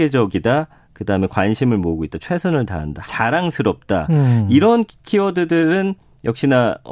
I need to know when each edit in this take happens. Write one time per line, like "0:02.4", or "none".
0:03.0

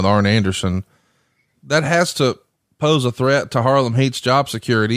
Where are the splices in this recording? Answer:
none

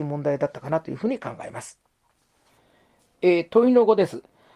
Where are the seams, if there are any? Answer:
none

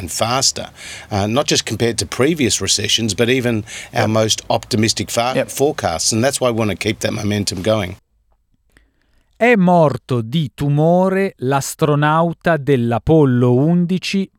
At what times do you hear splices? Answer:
none

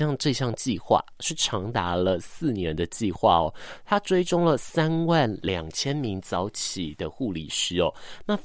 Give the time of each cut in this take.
none

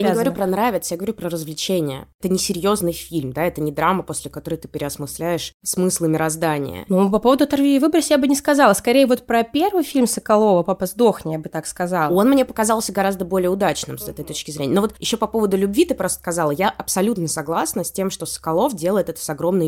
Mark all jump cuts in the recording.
none

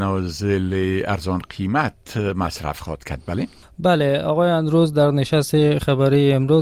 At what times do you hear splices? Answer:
none

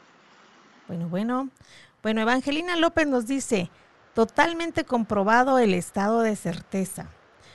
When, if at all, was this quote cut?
none

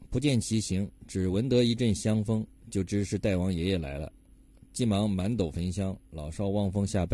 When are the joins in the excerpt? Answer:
none

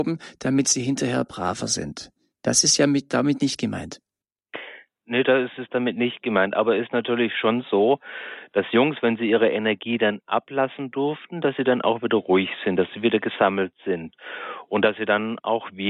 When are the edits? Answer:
none

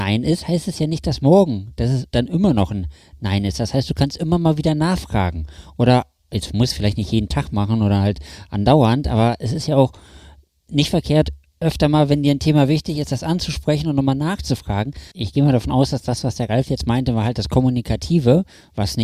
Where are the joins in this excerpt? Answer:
0:15.1

